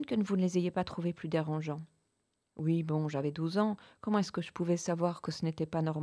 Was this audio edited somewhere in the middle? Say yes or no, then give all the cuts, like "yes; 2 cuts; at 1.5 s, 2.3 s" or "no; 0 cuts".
no; 0 cuts